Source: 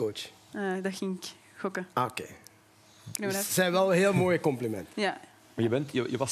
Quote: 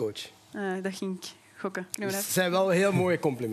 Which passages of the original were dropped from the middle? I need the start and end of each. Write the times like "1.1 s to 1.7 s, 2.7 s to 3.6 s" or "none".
1.9 s to 3.1 s

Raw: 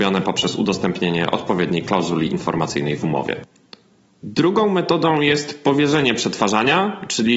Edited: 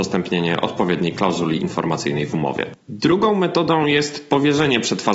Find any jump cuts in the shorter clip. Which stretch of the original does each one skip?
3.5 s to 4.1 s

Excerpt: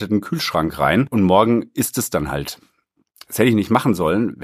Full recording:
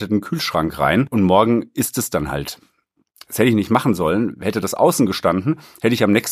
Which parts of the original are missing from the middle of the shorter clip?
none

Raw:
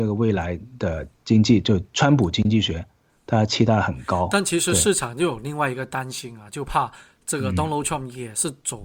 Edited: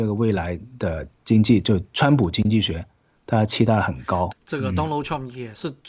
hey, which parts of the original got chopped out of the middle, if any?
4.3 s to 7.1 s

